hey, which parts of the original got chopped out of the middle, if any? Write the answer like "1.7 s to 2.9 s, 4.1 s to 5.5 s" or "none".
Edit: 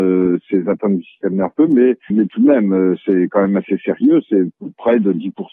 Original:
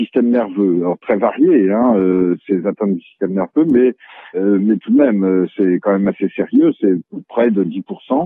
4.1 s to 4.6 s